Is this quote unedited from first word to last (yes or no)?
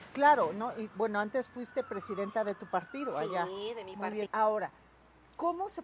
no